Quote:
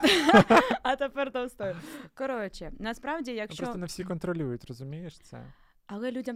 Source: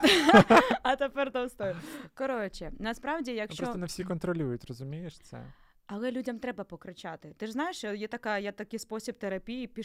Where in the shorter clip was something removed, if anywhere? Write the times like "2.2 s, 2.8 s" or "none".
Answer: none